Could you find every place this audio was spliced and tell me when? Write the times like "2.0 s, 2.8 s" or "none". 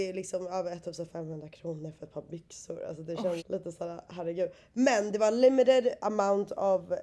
3.4 s